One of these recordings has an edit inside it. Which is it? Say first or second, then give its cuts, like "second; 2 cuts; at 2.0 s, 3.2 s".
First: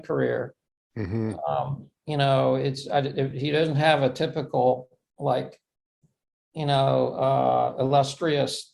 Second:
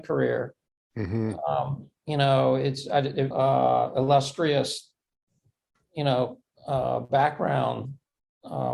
second; 1 cut; at 3.3 s